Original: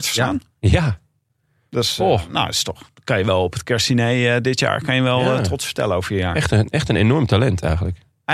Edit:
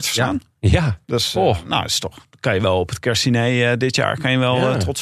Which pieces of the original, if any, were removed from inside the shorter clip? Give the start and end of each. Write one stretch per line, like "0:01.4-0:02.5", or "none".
0:01.0-0:01.7